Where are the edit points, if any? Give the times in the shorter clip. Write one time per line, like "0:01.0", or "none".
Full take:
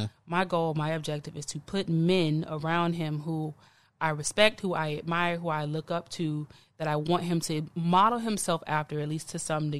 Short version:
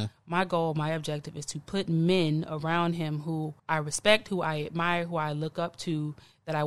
0:03.6